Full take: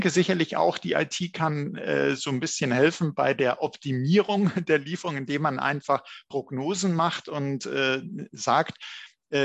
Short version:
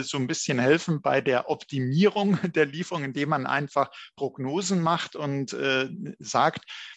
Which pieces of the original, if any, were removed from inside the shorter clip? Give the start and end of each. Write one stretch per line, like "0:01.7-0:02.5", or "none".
none